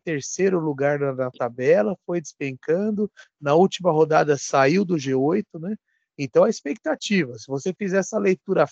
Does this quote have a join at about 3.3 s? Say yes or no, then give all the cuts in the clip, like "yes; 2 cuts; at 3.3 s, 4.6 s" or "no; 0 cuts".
no; 0 cuts